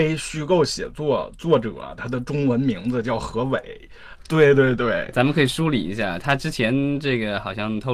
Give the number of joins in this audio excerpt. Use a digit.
1